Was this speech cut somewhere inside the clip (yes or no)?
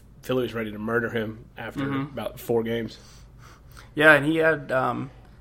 no